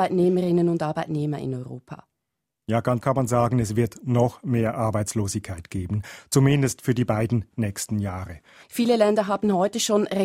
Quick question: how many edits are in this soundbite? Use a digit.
2